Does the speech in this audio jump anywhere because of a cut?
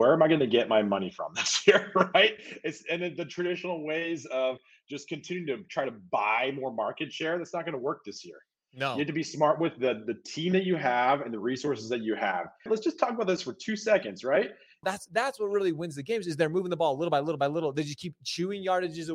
yes; 2 cuts; at 12.7 s, 14.8 s

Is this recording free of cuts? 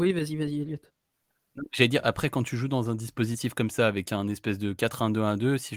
yes; 0 cuts

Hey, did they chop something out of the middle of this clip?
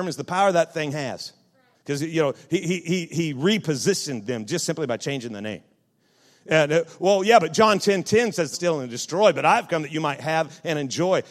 yes; 2 cuts; at 1.7 s, 8.5 s

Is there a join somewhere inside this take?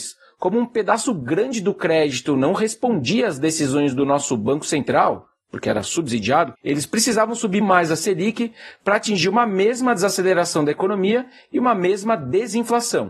yes; 2 cuts; at 6.5 s, 7.6 s

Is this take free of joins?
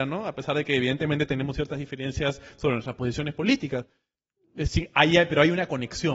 yes; 0 cuts

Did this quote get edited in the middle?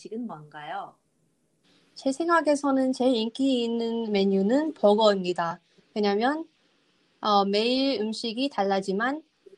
no; 0 cuts

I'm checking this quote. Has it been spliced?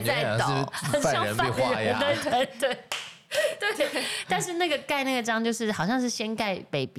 no; 0 cuts

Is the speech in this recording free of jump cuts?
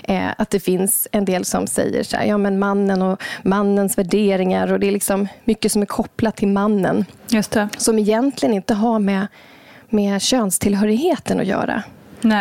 yes; 0 cuts

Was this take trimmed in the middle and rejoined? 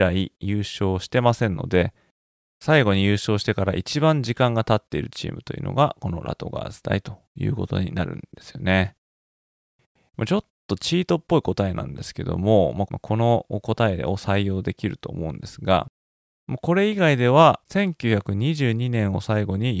yes; 2 cuts; at 12.9 s, 17.6 s

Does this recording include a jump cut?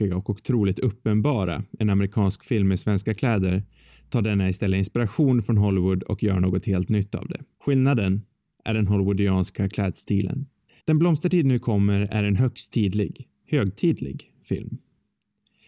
yes; 2 cuts; at 7.5 s, 10.8 s

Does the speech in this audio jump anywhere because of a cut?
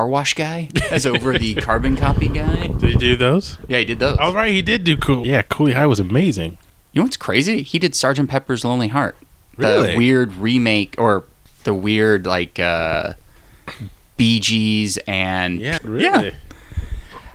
yes; 2 cuts; at 5.2 s, 15.8 s

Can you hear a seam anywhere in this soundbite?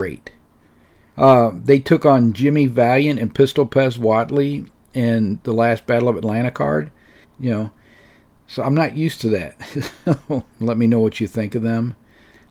yes; 3 cuts; at 1.1 s, 7.2 s, 10.5 s

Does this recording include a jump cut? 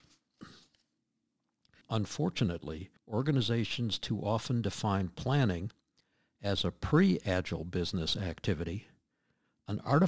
yes; 2 cuts; at 1.8 s, 3.0 s

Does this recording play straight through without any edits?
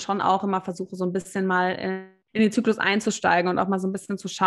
no; 1 cut; at 2.2 s

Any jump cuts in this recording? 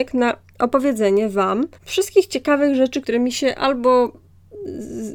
yes; 2 cuts; at 1.7 s, 3.0 s

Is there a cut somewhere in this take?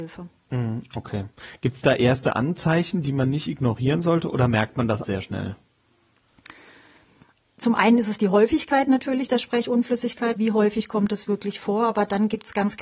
yes; 2 cuts; at 5.0 s, 10.4 s

